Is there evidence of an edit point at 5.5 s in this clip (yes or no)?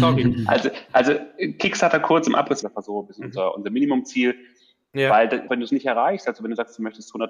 yes